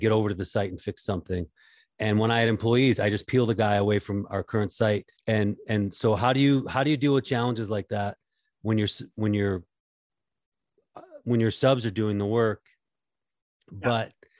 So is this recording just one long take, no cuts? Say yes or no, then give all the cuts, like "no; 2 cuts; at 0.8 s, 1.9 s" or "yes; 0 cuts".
no; 1 cut; at 5.1 s